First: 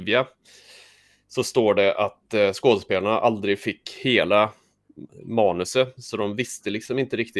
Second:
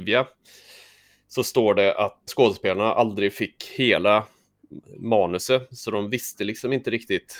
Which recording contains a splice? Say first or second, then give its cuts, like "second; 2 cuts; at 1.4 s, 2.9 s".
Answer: second; 1 cut; at 2.3 s